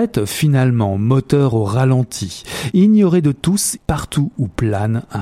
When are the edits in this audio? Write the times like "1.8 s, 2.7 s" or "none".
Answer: 2.7 s, 3.8 s

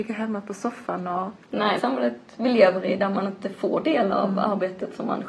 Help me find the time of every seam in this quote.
1.8 s

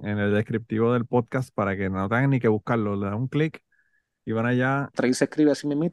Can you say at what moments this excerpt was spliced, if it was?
4.9 s

